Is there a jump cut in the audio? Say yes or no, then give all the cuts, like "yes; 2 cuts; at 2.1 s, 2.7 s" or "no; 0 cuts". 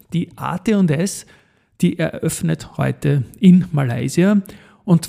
no; 0 cuts